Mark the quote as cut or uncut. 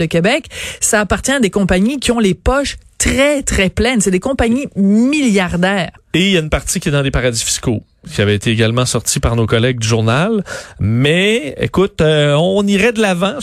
uncut